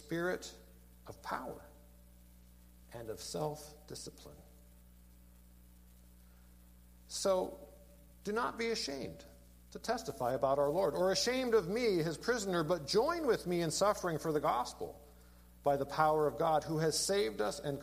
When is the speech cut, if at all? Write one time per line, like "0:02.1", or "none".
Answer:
0:02.8